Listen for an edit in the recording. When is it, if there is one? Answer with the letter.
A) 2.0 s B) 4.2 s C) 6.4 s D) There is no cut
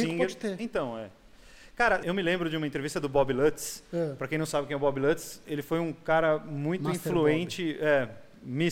A